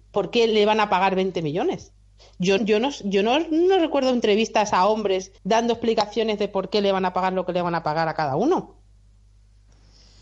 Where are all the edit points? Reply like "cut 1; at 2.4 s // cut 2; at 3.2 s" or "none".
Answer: cut 1; at 2.6 s // cut 2; at 5.4 s